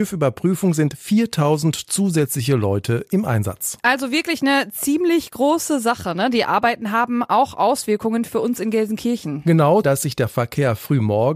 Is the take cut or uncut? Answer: cut